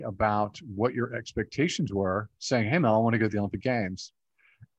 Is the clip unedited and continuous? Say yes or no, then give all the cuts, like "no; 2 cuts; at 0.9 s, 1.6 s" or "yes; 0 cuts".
yes; 0 cuts